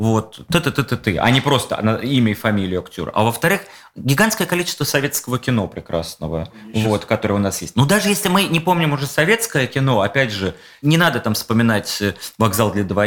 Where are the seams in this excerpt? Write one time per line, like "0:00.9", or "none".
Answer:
none